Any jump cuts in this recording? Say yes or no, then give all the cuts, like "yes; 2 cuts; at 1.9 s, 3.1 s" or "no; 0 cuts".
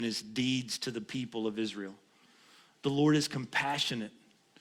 no; 0 cuts